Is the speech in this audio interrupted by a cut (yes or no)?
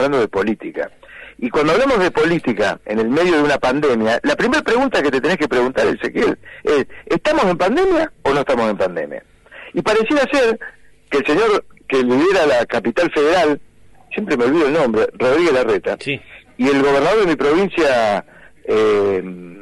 no